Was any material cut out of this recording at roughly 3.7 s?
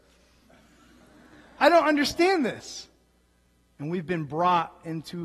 yes; 2 cuts; at 1.6 s, 3.7 s

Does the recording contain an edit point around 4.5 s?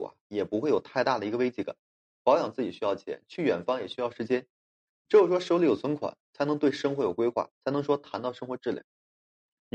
no; 1 cut; at 2.2 s

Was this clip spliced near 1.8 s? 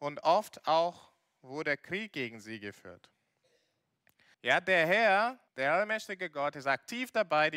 no; 2 cuts; at 4.3 s, 5.5 s

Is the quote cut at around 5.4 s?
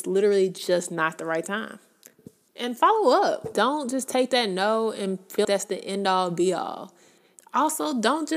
yes; 2 cuts; at 3.5 s, 5.4 s

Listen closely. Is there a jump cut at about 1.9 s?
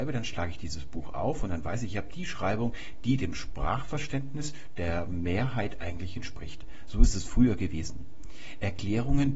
no; 0 cuts

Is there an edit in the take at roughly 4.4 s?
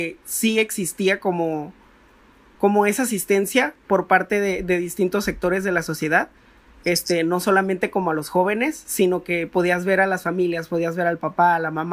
no; 0 cuts

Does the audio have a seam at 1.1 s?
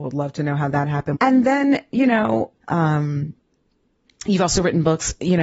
yes; 2 cuts; at 1.1 s, 2.6 s

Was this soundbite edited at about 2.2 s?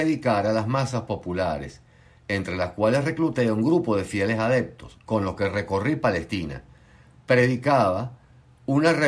no; 1 cut; at 4.9 s

